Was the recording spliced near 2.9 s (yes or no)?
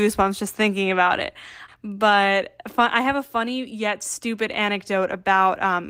no